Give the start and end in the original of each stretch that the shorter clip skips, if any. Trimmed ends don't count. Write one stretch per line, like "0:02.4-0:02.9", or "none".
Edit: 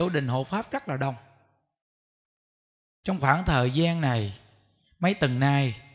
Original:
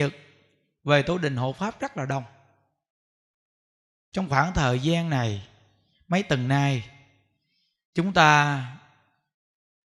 none